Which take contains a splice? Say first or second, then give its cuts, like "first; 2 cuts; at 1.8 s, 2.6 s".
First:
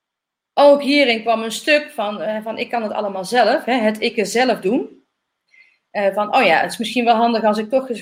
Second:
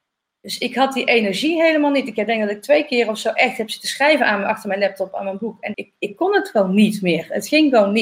second; 1 cut; at 5.7 s